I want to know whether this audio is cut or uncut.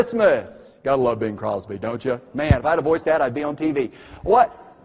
cut